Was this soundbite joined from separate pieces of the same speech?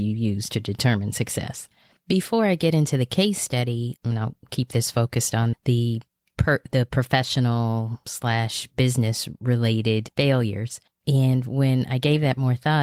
yes; 3 cuts; at 4.0 s, 5.5 s, 11.0 s

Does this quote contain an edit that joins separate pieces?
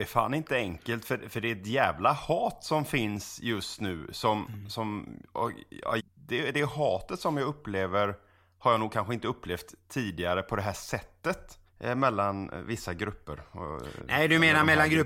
yes; 2 cuts; at 6.0 s, 11.7 s

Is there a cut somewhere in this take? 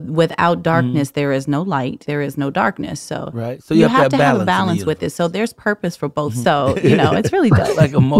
yes; 2 cuts; at 2.0 s, 6.4 s

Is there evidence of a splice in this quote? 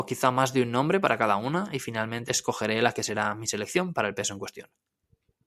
yes; 1 cut; at 2.2 s

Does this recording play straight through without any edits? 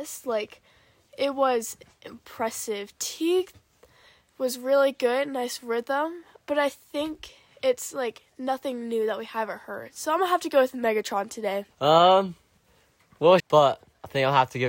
no; 2 cuts; at 11.7 s, 13.4 s

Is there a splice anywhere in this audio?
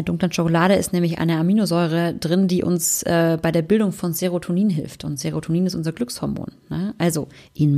no; 0 cuts

